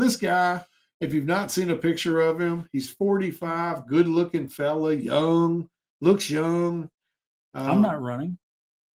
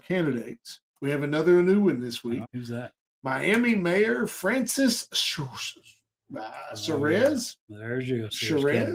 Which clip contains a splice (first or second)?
second